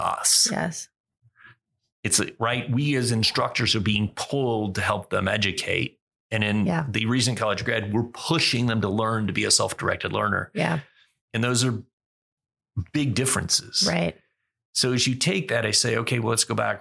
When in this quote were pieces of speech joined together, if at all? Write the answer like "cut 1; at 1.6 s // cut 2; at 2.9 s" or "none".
none